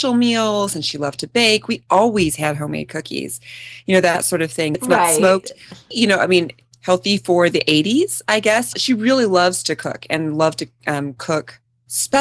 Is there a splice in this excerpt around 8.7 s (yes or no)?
yes